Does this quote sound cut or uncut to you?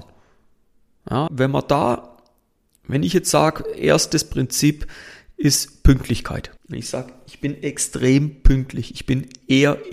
cut